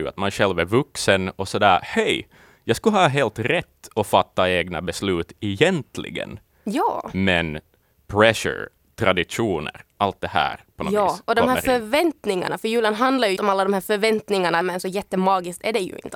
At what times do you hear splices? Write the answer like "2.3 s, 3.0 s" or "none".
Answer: 13.4 s, 14.6 s